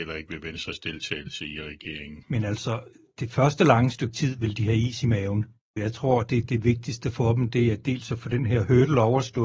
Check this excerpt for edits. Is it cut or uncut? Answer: cut